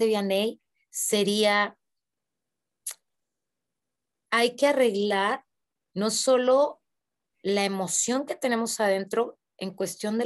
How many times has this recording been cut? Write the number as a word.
zero